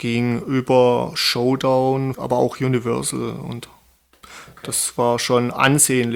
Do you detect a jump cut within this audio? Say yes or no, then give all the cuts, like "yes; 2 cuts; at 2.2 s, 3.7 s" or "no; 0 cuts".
yes; 1 cut; at 2.1 s